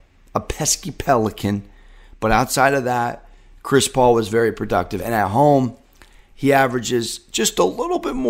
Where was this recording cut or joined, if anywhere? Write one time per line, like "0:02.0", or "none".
none